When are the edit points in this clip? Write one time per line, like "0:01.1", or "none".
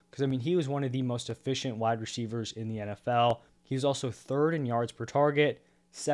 0:03.5